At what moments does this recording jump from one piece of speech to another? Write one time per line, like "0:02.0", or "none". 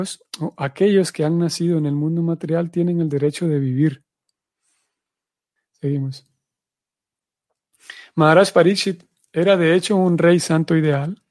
0:05.6